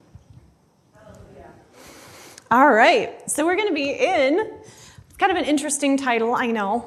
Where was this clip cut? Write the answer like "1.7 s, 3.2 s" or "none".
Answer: 0.9 s, 5.0 s